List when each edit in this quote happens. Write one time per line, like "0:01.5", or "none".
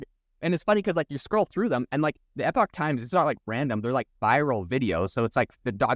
0:02.3